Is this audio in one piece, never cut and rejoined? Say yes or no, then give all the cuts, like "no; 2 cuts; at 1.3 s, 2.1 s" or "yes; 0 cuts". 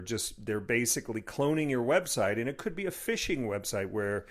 yes; 0 cuts